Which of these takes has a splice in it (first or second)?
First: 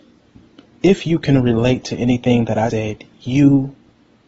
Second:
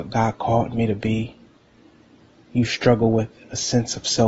first